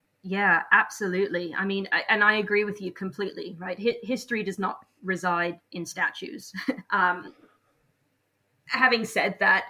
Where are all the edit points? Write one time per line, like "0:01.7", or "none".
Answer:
0:06.8